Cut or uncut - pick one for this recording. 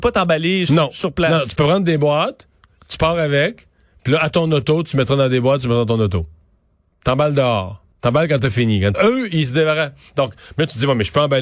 cut